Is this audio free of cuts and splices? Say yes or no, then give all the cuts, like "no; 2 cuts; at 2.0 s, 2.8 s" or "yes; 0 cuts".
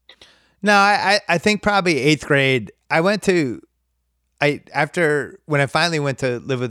yes; 0 cuts